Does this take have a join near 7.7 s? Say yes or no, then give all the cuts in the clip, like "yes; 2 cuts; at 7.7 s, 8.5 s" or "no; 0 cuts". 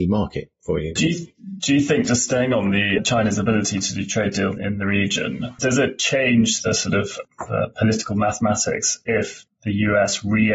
no; 1 cut; at 1.0 s